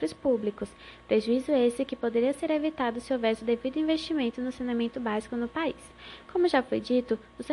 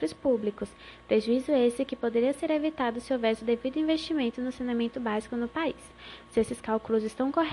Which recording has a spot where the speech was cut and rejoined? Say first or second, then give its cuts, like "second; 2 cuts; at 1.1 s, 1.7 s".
second; 1 cut; at 6.2 s